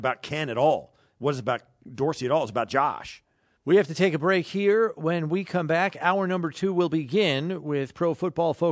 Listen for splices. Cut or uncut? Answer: cut